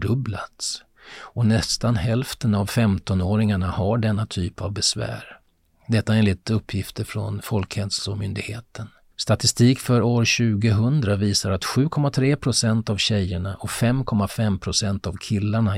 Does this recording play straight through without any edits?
yes; 0 cuts

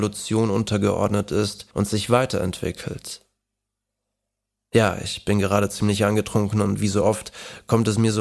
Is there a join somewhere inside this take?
yes; 1 cut; at 1.7 s

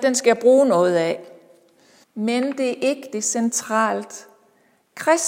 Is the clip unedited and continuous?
no; 1 cut; at 2.0 s

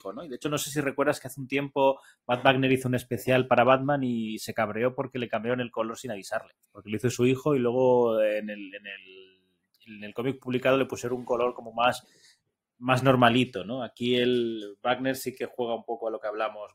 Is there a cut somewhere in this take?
yes; 1 cut; at 6.6 s

